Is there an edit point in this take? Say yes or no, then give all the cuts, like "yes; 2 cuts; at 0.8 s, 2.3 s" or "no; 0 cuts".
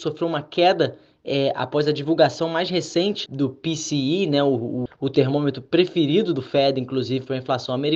yes; 2 cuts; at 3.3 s, 4.9 s